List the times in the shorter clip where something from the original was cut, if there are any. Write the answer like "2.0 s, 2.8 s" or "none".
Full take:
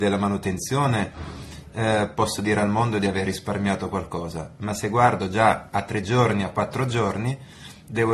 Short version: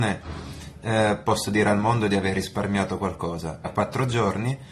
3.6 s